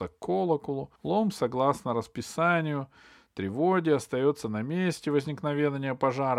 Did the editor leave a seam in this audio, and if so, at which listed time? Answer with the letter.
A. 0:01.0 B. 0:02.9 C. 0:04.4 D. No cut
A